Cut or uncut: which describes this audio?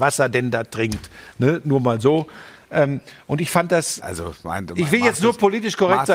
cut